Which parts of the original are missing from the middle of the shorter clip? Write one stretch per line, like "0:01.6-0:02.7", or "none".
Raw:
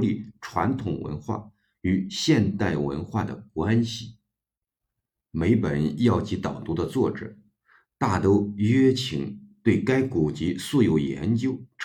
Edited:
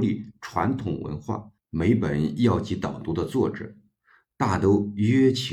0:01.6-0:05.2

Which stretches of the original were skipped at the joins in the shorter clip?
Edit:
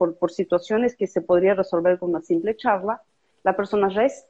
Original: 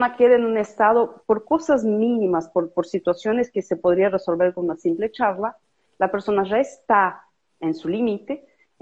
none

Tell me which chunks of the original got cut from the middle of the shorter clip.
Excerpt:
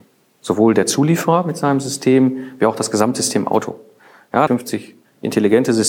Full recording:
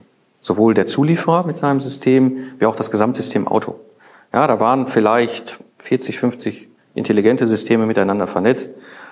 0:04.5-0:06.2

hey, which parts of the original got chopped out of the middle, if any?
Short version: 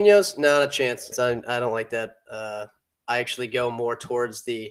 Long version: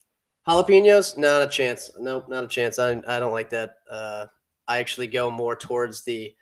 0:01.9-0:02.7

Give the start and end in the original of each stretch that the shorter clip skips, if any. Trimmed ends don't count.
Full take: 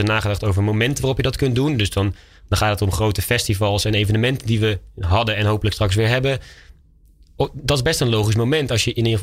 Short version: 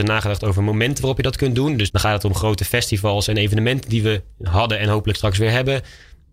0:01.9-0:02.5

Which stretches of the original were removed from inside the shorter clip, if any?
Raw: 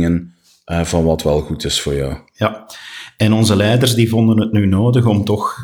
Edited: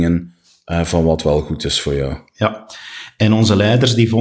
none

